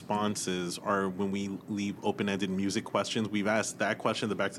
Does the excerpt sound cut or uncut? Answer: uncut